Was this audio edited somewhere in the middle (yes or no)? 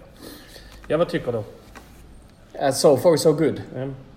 no